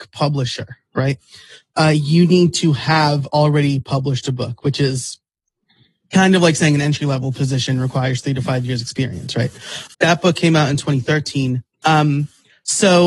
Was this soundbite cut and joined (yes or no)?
yes